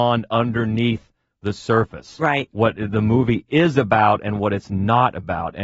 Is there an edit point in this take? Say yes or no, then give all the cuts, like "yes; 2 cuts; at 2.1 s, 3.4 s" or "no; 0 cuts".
no; 0 cuts